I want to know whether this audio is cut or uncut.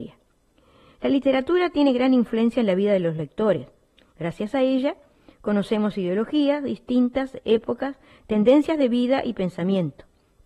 uncut